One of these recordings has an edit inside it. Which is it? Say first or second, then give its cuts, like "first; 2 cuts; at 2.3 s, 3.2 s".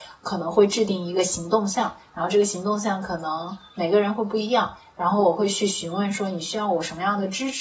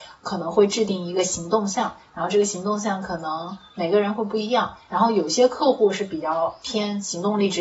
second; 1 cut; at 4.9 s